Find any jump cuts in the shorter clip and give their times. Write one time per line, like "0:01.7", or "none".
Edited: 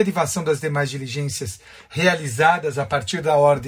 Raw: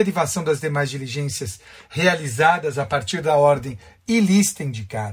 none